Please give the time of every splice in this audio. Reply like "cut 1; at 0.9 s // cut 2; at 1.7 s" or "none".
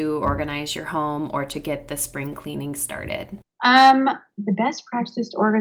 none